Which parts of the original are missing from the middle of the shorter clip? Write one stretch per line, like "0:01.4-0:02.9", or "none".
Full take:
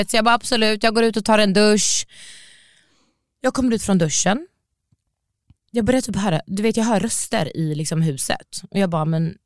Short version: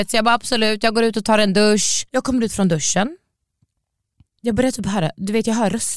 0:02.1-0:03.4